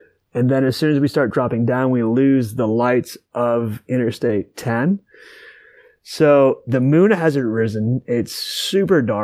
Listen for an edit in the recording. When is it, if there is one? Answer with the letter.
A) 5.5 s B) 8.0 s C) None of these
C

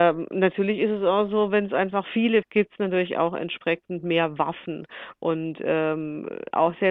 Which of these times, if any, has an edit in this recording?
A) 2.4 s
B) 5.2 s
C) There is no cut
A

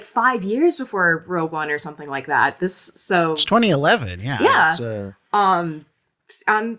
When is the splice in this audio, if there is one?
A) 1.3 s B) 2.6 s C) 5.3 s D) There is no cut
D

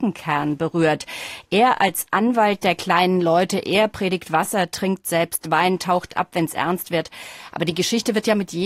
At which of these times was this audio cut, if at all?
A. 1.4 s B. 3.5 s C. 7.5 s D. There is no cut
C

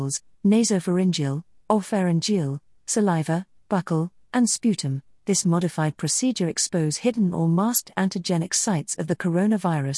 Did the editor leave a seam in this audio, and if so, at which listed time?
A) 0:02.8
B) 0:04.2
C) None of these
B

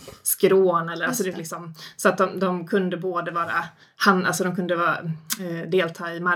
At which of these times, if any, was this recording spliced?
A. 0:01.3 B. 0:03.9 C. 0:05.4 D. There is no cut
D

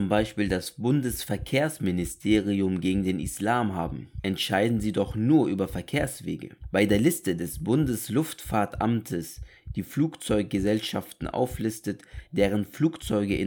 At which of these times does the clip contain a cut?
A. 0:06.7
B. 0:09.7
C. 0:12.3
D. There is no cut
D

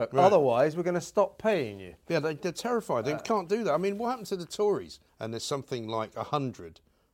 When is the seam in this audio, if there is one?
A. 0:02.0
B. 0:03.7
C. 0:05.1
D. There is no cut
C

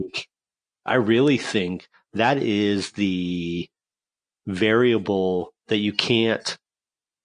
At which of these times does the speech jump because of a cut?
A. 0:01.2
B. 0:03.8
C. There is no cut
C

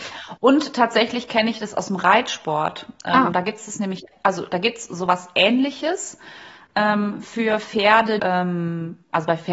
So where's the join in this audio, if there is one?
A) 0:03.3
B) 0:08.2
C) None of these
B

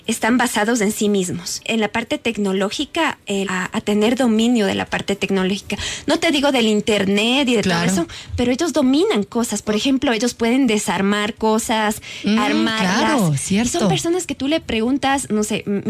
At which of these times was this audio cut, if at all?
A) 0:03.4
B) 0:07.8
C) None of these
A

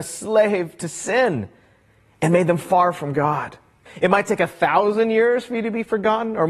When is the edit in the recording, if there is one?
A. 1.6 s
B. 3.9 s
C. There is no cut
B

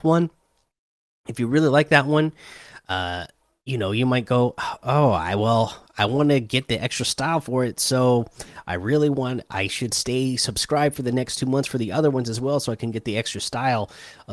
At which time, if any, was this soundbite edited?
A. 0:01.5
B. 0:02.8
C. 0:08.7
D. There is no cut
D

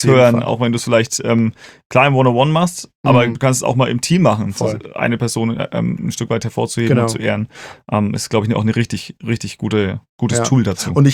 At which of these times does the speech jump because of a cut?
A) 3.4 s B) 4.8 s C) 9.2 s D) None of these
D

